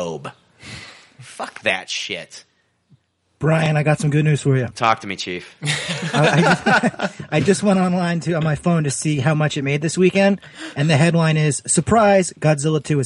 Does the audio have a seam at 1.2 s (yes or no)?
no